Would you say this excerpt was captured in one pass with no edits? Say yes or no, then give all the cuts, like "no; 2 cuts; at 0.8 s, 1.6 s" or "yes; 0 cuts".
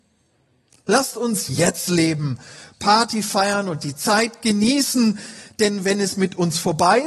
yes; 0 cuts